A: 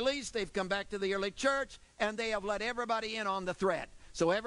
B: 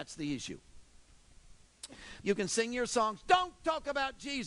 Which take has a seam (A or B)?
B